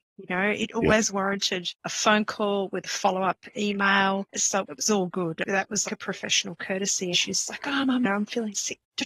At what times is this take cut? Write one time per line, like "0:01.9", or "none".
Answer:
0:05.9
0:07.1